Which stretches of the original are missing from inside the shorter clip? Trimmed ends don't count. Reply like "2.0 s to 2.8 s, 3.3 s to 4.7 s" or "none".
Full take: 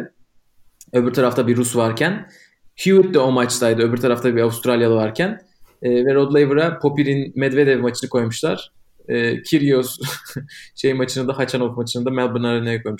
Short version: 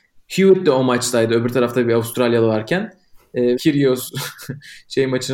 6.0 s to 9.4 s

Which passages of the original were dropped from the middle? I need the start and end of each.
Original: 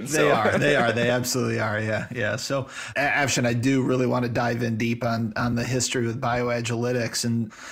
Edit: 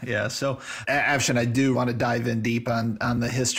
3.8 s to 4.1 s

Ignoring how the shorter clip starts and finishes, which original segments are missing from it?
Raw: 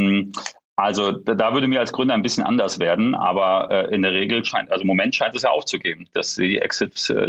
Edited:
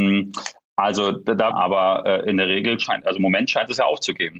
1.5 s to 3.2 s

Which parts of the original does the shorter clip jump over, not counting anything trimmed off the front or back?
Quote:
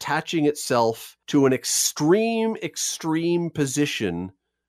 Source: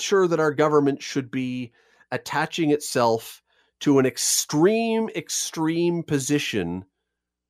3.5 s to 3.8 s

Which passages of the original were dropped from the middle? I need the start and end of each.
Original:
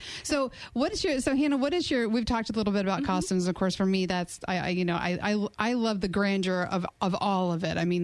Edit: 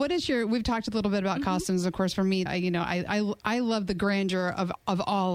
4.1 s to 4.6 s

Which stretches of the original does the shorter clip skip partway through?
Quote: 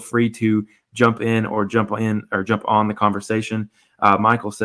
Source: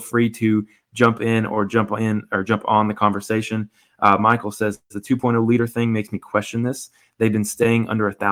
none

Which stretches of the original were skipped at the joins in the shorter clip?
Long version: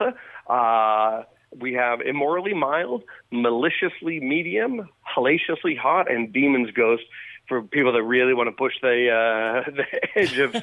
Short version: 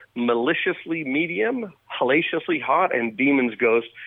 none

